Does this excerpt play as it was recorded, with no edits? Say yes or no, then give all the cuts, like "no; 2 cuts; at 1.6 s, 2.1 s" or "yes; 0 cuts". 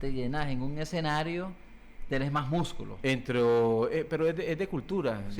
yes; 0 cuts